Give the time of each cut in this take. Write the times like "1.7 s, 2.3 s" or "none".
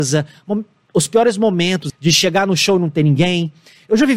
1.9 s